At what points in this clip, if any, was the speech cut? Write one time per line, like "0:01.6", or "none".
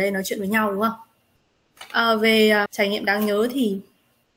0:02.7